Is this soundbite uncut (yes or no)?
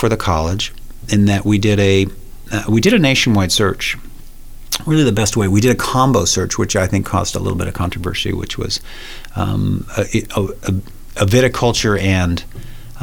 yes